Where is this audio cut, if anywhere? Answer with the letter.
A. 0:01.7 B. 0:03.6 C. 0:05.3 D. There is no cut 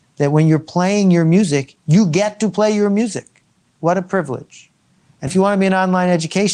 C